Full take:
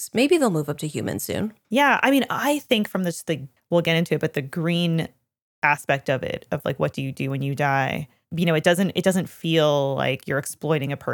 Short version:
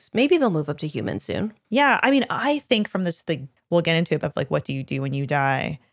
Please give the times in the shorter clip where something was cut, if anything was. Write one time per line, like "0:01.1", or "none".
0:04.2